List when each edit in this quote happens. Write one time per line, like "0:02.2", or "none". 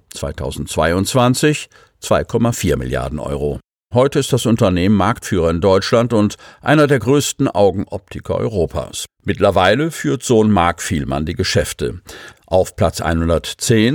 0:03.9